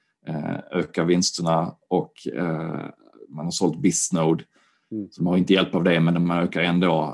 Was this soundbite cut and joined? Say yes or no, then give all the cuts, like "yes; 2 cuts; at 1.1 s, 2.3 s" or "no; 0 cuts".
no; 0 cuts